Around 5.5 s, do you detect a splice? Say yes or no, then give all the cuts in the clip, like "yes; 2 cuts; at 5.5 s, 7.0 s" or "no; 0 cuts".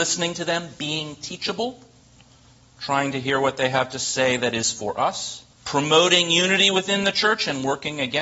yes; 1 cut; at 5.5 s